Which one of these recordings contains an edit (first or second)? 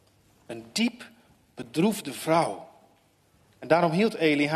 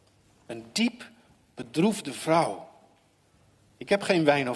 first